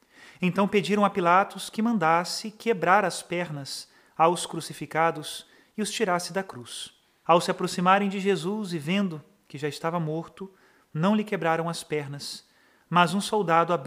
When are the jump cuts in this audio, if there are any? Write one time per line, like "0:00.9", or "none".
0:07.2